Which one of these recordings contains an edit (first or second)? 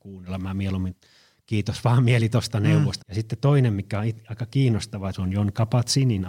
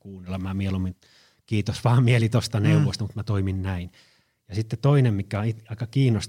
first